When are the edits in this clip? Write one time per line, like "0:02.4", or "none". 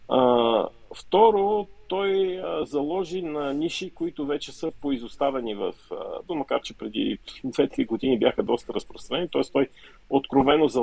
0:06.3